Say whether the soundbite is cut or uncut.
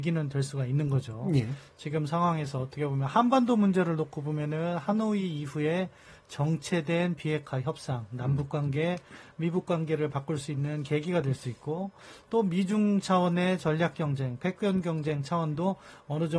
uncut